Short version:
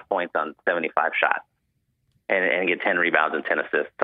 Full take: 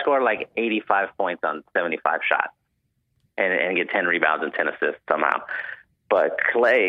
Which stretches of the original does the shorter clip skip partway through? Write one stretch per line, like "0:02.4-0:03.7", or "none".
none